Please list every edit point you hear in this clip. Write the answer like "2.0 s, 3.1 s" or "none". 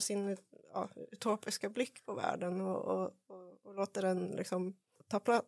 none